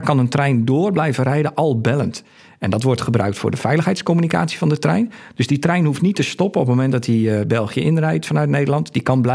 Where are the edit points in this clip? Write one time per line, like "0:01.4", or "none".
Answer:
none